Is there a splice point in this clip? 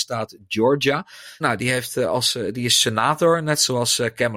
yes; 1 cut; at 1.4 s

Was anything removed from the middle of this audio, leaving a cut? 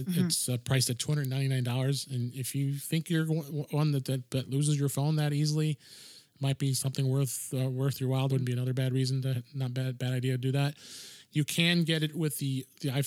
yes; 1 cut; at 8.3 s

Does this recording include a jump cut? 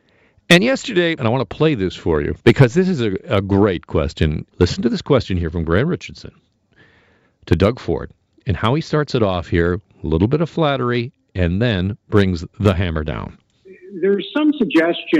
yes; 3 cuts; at 1.2 s, 2.4 s, 4.5 s

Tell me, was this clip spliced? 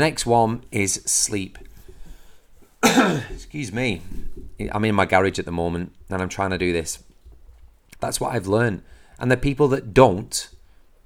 yes; 1 cut; at 7.9 s

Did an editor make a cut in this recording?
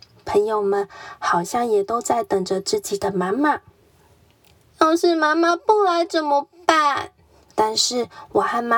yes; 1 cut; at 7.5 s

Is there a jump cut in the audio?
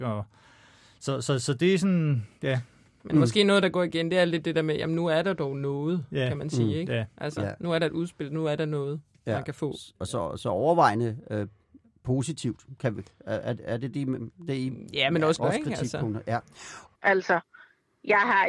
yes; 2 cuts; at 15.4 s, 16.9 s

